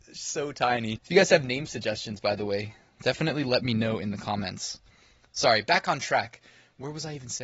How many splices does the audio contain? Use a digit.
1